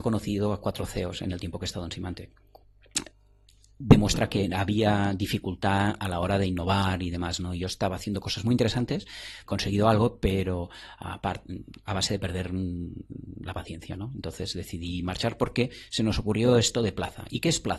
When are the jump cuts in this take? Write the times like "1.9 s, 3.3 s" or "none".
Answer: 9.5 s